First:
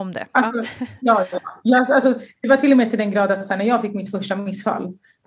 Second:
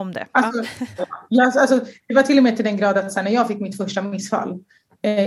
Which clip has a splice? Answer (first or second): second